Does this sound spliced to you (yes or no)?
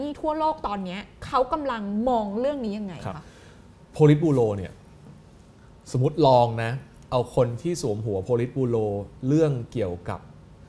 no